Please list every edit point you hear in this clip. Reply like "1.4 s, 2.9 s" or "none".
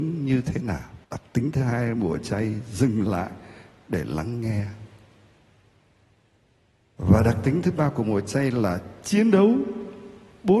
1.0 s